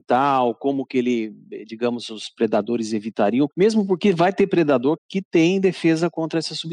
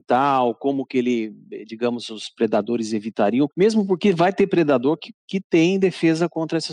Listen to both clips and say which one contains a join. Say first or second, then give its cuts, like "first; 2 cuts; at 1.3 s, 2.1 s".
first; 1 cut; at 5.0 s